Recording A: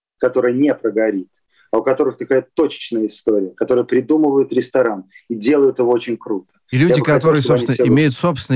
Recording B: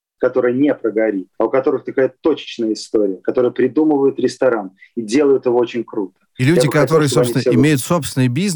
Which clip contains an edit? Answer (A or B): B